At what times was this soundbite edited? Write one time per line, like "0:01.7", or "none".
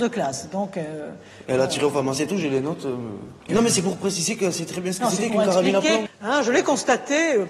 0:03.5
0:06.1